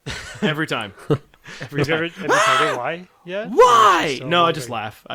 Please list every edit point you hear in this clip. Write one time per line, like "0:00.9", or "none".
none